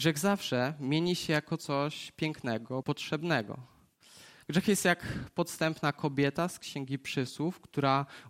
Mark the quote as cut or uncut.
cut